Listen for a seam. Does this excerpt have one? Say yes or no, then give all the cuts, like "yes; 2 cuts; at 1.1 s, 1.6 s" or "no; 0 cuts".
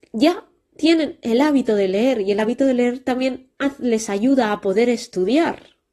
no; 0 cuts